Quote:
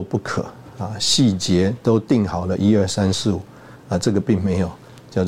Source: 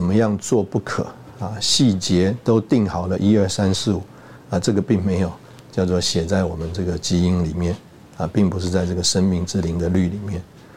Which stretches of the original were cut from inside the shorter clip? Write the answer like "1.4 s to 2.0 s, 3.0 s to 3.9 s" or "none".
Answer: none